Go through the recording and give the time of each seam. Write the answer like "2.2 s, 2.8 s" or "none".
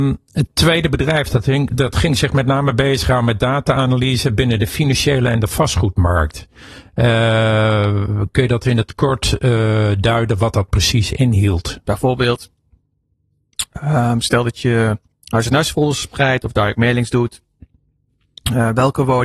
11.8 s